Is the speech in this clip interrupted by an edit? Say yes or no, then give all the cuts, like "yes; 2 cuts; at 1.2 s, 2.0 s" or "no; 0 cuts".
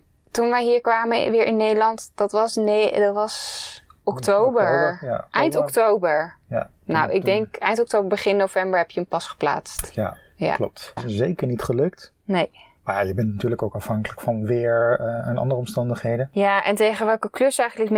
yes; 1 cut; at 11.0 s